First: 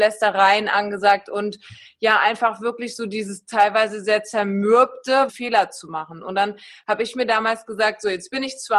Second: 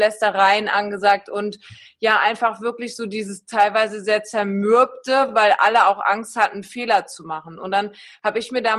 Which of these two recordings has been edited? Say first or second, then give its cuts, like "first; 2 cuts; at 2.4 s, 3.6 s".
first; 1 cut; at 5.3 s